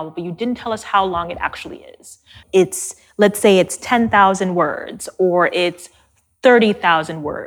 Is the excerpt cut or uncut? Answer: cut